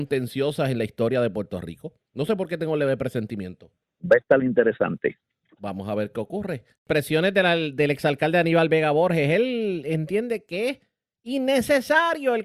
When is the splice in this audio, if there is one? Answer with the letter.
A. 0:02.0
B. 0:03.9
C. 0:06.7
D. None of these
C